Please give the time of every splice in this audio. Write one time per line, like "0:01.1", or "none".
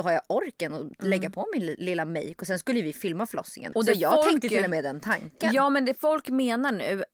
0:03.7